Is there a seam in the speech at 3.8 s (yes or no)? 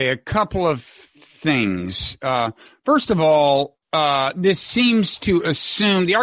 yes